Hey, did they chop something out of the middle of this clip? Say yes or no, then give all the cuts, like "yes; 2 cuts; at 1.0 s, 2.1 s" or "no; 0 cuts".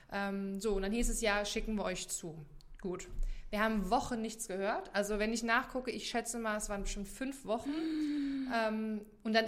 no; 0 cuts